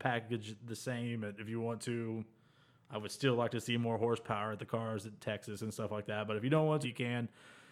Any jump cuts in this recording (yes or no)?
yes